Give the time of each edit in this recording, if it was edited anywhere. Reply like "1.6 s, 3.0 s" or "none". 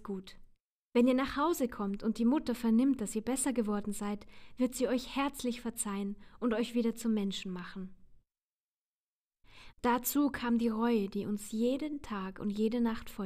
9.7 s